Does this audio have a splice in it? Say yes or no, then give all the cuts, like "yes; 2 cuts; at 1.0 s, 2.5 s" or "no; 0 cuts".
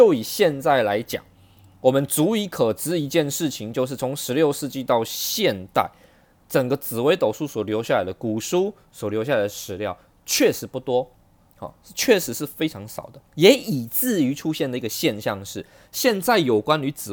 yes; 1 cut; at 13.3 s